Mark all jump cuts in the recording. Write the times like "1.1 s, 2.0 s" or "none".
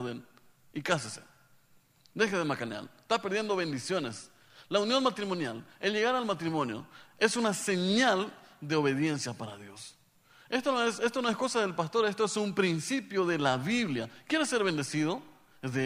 none